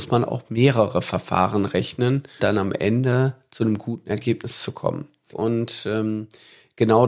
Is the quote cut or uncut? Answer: cut